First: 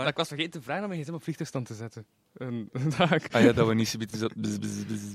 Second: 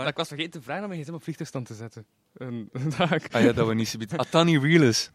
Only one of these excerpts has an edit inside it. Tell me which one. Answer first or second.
second